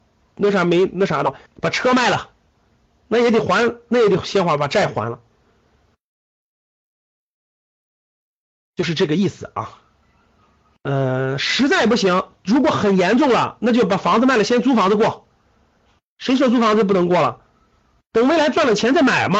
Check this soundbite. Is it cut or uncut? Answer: cut